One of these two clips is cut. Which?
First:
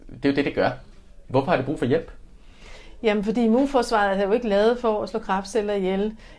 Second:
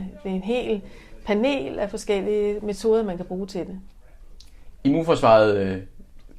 first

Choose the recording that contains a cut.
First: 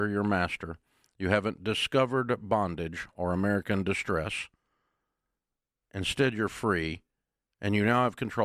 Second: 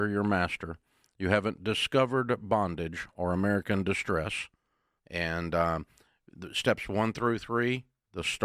second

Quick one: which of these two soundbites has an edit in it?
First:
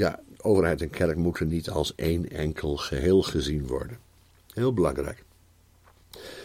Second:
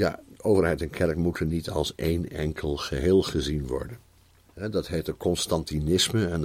second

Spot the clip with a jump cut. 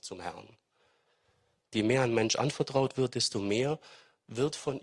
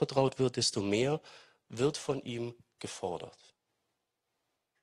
first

